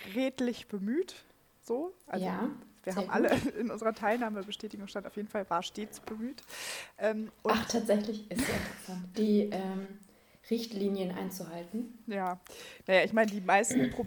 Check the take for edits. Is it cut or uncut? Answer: cut